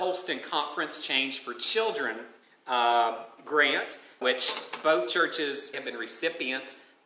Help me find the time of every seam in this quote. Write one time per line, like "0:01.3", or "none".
0:04.2
0:05.7